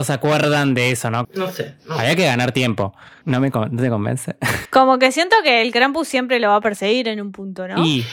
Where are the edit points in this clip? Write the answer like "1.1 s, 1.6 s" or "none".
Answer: 1.2 s, 3.2 s, 4.7 s